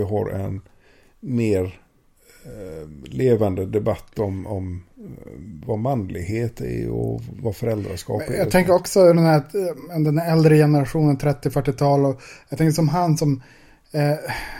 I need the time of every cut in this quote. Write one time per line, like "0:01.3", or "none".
none

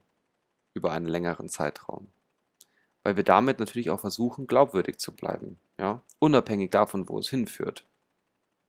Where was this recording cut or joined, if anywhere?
0:06.1

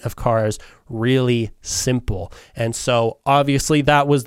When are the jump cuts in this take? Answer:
none

